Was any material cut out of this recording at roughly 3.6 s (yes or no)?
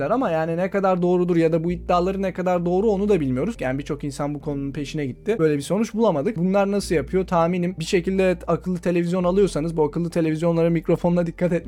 yes